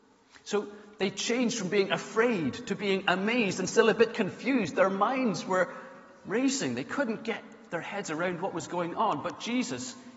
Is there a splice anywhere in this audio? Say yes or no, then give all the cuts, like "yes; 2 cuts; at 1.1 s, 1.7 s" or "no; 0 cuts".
no; 0 cuts